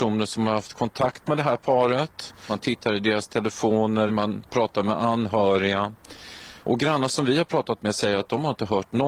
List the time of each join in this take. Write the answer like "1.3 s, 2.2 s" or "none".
4.1 s, 6.6 s